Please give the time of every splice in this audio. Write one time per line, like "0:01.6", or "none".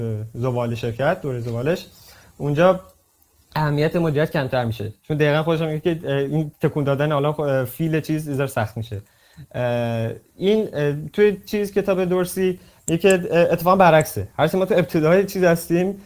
none